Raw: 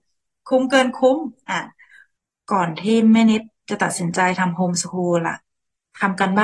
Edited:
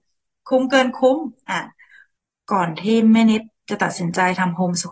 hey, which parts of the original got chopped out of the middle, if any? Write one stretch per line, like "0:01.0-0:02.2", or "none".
none